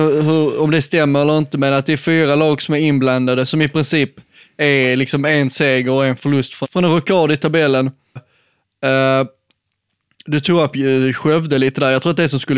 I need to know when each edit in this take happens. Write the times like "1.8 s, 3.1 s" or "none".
6.6 s, 8.2 s